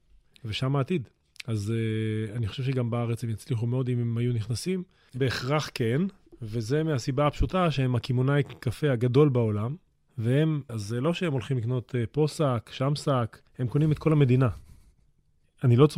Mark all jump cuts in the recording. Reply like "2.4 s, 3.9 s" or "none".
5.1 s, 10.7 s, 13.5 s